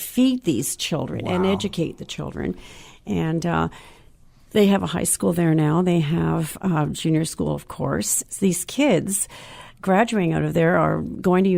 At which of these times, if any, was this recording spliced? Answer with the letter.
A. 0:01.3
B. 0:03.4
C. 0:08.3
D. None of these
C